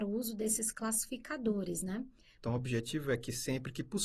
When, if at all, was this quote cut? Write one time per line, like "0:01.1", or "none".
0:02.4